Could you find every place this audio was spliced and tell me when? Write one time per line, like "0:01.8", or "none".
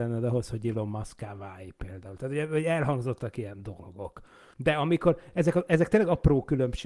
0:04.5